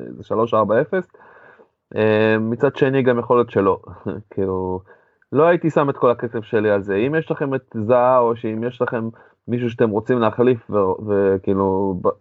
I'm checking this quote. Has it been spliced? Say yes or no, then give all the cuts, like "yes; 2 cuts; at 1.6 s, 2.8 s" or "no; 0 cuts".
no; 0 cuts